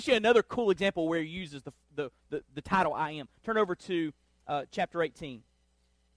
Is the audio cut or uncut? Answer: uncut